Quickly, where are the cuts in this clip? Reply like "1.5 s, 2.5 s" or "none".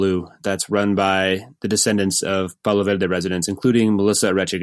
none